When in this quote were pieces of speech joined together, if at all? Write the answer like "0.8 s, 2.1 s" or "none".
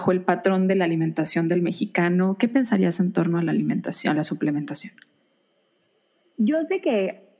none